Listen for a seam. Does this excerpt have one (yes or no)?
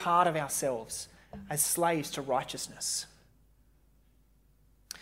no